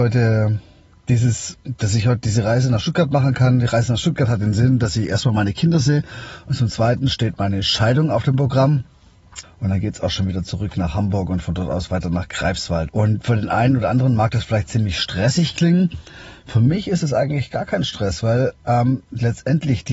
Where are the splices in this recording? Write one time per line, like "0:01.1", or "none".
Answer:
0:09.4
0:12.9